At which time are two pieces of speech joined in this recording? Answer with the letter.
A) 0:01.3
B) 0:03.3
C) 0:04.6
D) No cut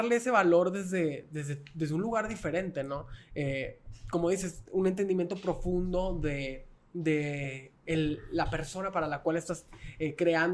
D